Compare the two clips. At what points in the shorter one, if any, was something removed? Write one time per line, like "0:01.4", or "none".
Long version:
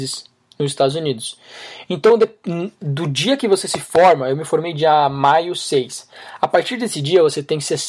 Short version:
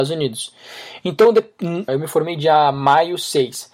0:01.9